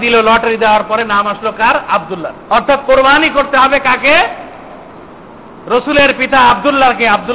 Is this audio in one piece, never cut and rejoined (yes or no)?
no